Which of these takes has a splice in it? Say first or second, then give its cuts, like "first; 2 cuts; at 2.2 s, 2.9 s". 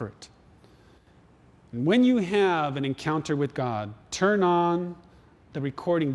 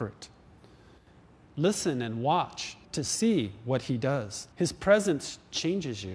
second; 3 cuts; at 1.5 s, 2.8 s, 4.5 s